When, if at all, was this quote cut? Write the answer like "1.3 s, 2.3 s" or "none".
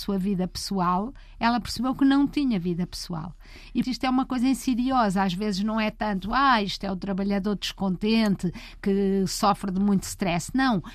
3.8 s